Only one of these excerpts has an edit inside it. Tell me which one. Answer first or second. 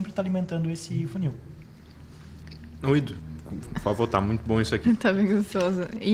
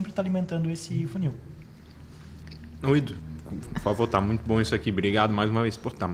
first